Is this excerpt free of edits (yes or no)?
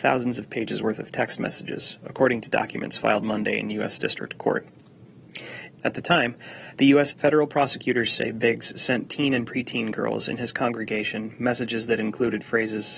no